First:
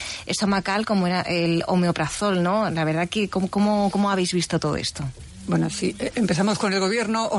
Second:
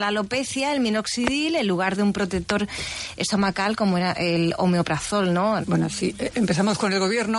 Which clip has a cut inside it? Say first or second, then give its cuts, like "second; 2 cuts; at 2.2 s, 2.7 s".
second; 1 cut; at 5.6 s